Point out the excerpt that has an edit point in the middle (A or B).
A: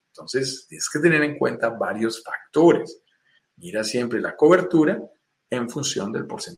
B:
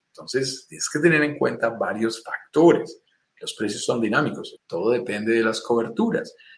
B